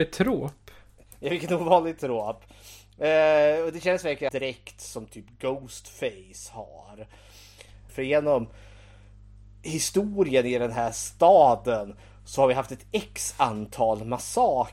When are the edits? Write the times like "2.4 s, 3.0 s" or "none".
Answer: 4.3 s, 7.9 s